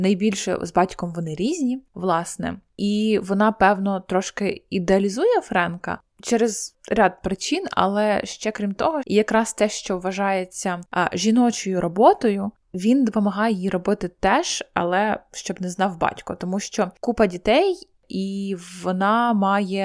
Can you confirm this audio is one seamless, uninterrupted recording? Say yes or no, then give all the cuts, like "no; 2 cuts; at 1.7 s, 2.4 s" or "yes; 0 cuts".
no; 1 cut; at 9.0 s